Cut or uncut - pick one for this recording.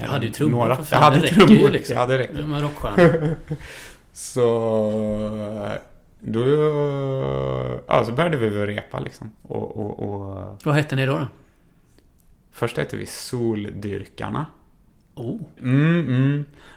cut